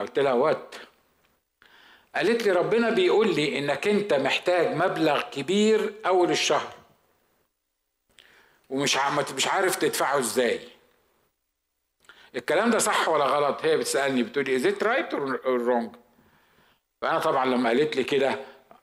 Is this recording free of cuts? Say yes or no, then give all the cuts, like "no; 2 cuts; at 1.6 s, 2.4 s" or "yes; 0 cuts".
yes; 0 cuts